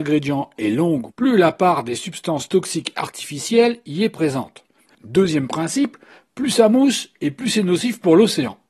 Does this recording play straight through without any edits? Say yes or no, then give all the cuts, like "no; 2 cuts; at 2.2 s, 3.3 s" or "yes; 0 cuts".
no; 2 cuts; at 1.1 s, 4.9 s